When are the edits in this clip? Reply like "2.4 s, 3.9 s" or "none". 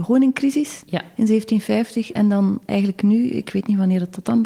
none

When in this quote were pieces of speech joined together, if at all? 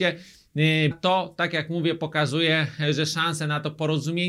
0.9 s

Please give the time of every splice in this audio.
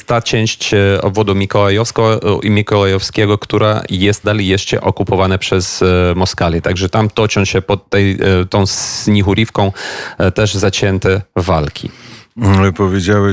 4.2 s

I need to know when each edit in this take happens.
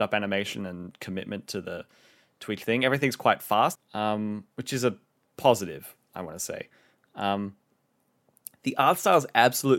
3.8 s

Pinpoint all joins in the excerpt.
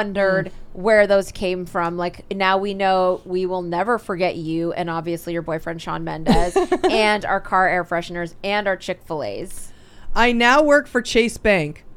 none

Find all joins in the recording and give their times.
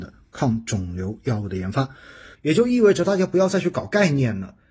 2.3 s

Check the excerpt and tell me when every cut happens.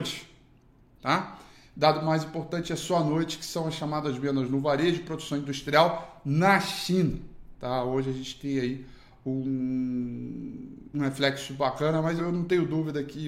10.9 s, 12.2 s

